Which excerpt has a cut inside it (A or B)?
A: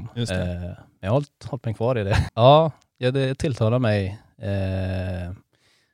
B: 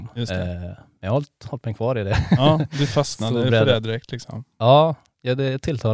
A